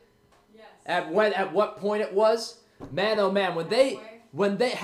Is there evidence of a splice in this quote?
no; 0 cuts

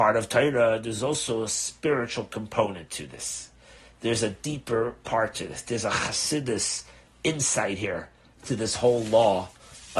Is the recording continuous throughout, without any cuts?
yes; 0 cuts

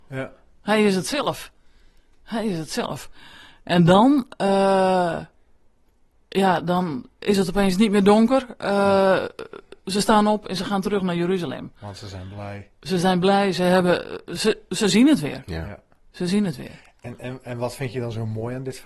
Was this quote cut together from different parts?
yes; 1 cut; at 9.8 s

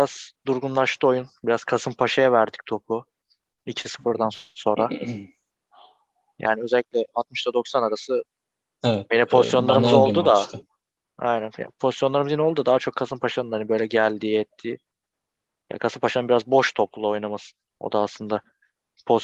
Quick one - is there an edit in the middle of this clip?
yes; 1 cut; at 9.1 s

